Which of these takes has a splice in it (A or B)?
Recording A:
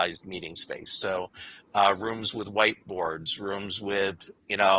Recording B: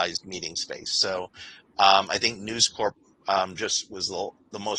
B